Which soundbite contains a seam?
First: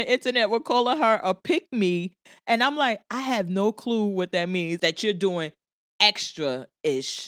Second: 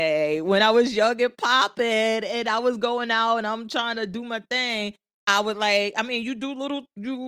first; 1 cut; at 4.8 s

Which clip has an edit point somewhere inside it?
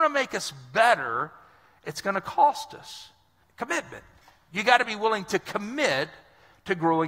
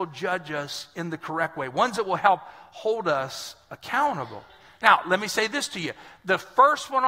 first; 1 cut; at 3.4 s

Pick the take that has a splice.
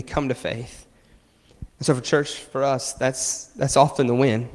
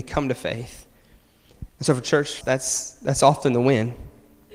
second; 1 cut; at 2.4 s

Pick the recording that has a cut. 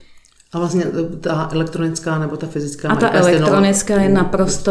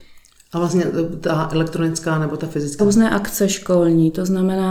second; 1 cut; at 2.8 s

